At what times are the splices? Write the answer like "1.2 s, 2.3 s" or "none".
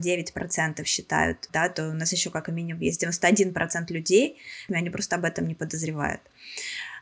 1.5 s, 4.7 s